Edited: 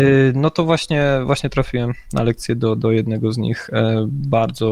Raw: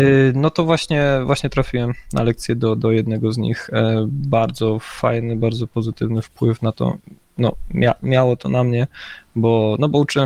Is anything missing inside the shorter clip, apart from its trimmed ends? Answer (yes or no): no